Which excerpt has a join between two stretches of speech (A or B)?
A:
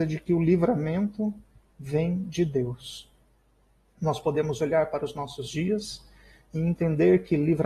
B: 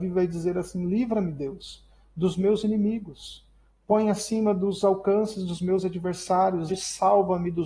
B